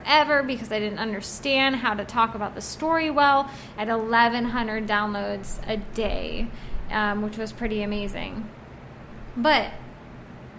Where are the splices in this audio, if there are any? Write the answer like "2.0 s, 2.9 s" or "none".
3.7 s